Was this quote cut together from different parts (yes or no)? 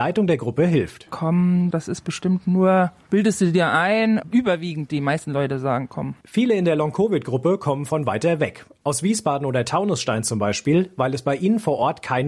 yes